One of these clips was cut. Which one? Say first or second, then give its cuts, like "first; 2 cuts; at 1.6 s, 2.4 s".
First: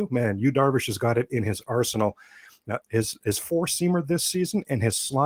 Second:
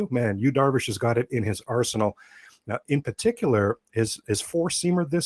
first; 1 cut; at 2.8 s